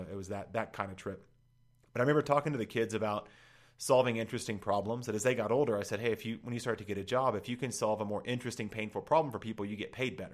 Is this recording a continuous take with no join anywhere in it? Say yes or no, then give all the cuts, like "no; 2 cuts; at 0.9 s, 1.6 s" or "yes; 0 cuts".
yes; 0 cuts